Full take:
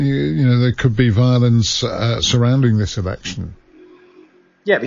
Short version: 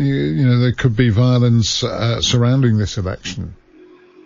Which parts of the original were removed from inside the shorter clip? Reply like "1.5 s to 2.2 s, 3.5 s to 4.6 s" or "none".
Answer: none